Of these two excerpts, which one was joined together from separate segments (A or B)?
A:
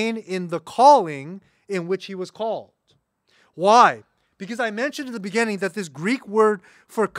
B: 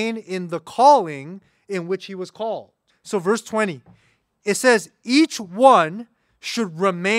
B